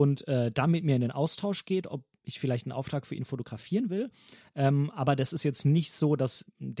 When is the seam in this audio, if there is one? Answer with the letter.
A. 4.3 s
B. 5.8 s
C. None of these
C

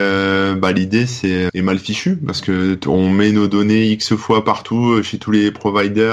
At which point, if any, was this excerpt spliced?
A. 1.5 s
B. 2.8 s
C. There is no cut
A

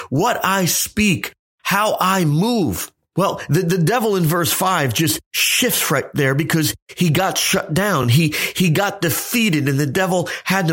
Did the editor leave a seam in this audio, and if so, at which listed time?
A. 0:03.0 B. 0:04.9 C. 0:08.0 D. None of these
D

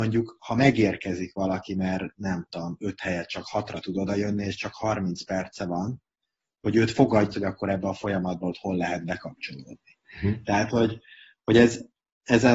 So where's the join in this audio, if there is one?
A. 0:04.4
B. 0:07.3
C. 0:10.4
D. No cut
B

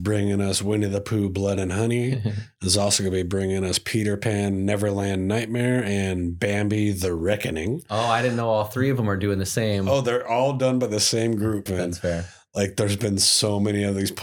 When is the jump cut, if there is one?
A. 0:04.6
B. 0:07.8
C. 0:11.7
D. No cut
C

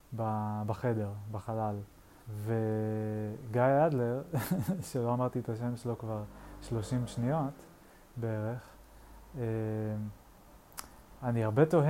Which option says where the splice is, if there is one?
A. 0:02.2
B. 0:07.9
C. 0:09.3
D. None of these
A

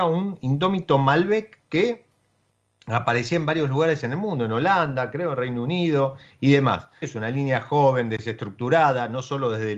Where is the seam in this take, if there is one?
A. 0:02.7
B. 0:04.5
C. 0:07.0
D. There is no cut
C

